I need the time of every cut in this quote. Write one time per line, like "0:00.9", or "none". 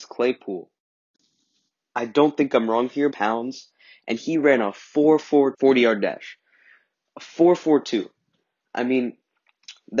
0:03.1
0:05.5